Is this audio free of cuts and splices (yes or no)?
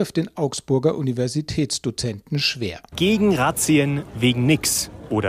no